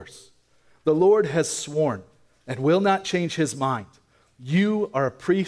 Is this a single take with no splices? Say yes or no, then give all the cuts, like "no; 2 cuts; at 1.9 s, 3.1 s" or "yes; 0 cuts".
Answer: yes; 0 cuts